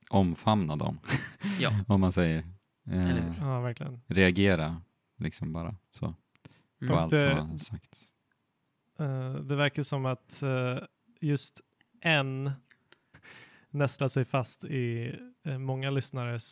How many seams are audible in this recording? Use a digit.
1